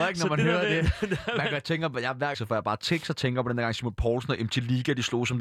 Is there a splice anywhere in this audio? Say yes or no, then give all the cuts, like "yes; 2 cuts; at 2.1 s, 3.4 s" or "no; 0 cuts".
yes; 1 cut; at 2.3 s